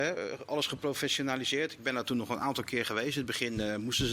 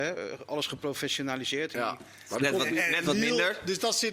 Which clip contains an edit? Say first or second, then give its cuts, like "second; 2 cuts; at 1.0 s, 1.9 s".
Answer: second; 1 cut; at 1.7 s